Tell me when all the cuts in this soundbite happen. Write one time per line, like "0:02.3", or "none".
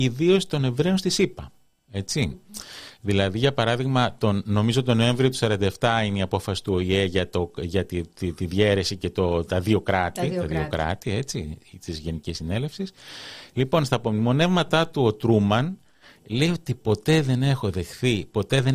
none

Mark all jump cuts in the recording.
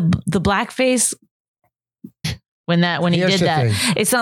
0:02.2

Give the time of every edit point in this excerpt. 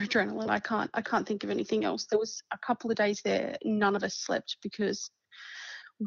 none

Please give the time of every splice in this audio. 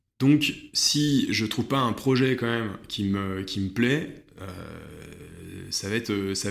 none

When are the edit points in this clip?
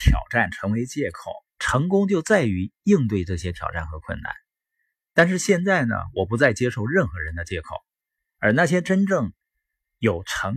0:01.5
0:05.0
0:08.2

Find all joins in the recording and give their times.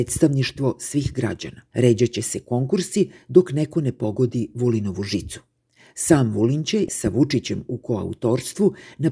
0:01.7

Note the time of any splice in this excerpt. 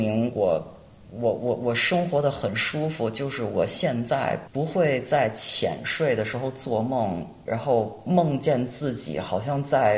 none

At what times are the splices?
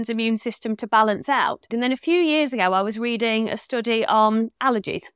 0:01.7

